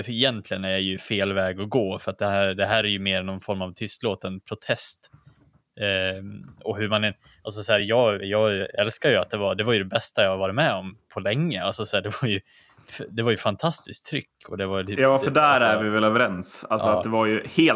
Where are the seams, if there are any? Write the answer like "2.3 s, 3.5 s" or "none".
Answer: none